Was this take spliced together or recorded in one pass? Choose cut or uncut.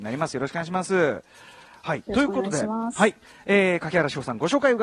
uncut